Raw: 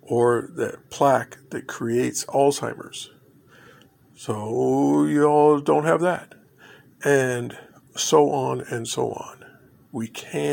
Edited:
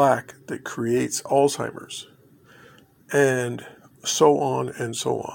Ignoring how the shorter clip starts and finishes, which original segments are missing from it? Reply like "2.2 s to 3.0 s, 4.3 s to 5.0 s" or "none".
4.0 s to 6.9 s